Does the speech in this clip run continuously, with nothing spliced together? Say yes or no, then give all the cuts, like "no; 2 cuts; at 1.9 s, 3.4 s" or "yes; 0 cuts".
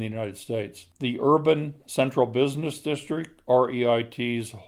no; 1 cut; at 0.9 s